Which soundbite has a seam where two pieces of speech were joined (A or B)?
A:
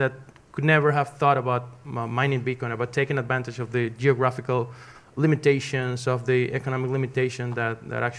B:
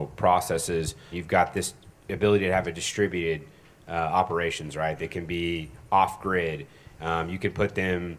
B